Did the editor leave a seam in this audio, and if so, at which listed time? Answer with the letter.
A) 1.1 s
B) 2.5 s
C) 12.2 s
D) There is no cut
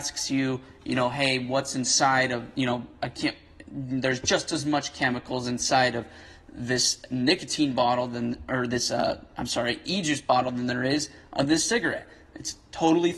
D